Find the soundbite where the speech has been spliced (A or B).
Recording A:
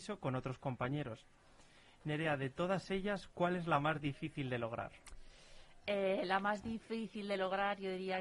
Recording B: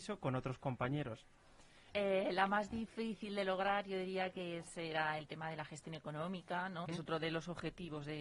B